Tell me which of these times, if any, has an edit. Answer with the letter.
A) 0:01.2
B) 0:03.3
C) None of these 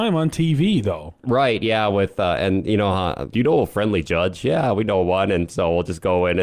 B